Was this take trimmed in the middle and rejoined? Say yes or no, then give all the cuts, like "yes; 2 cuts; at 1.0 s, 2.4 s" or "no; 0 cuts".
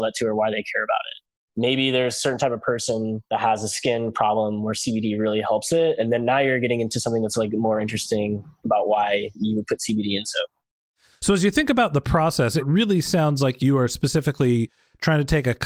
no; 0 cuts